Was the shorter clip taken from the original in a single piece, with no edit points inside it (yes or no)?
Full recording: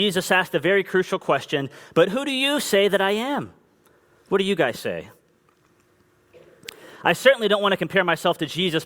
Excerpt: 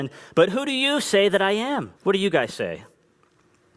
no